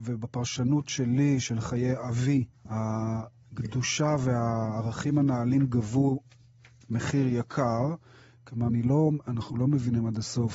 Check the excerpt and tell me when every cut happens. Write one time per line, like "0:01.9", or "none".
0:02.5
0:08.7